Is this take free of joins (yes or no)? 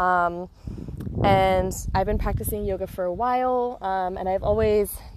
yes